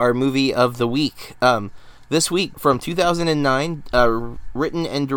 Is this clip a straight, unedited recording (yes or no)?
no